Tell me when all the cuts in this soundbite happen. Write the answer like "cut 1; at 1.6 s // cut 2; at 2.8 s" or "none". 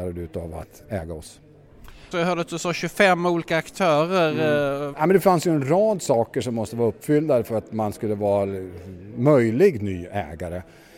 cut 1; at 2.1 s // cut 2; at 4.9 s